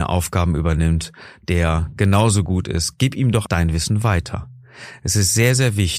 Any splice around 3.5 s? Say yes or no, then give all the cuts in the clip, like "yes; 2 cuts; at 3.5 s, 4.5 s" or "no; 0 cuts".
yes; 1 cut; at 3.5 s